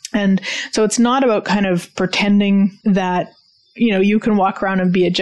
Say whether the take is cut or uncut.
cut